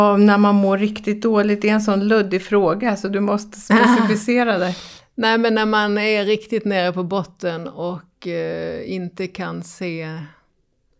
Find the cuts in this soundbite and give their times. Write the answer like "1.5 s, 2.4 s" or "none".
none